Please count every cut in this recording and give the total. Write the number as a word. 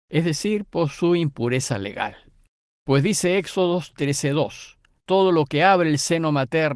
two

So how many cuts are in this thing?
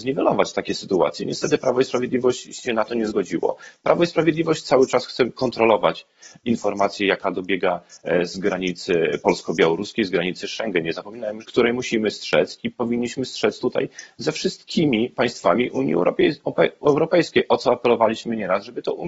one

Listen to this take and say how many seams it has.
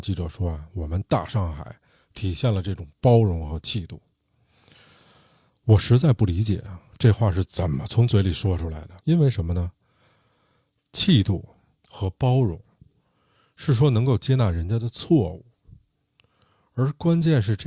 one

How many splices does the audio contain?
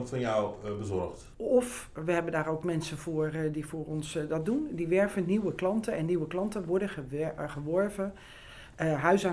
one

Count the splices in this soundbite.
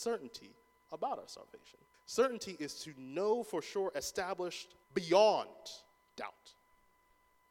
two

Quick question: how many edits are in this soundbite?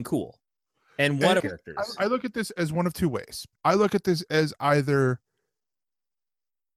two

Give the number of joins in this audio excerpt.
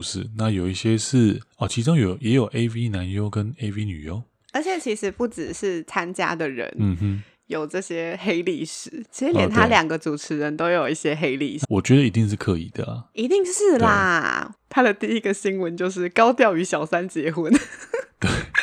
three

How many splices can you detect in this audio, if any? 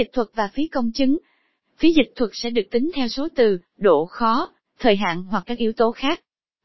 zero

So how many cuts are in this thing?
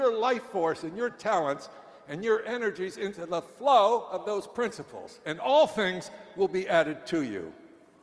zero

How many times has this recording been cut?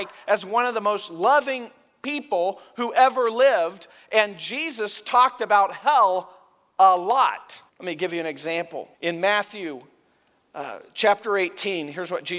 two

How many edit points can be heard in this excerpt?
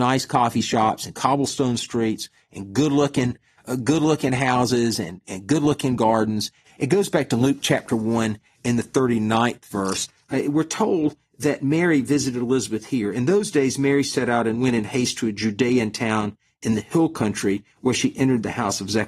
one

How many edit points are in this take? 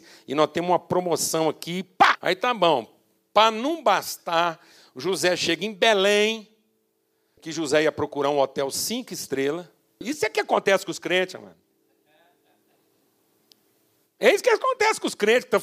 three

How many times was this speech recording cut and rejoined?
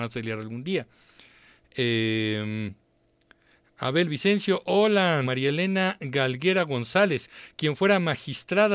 one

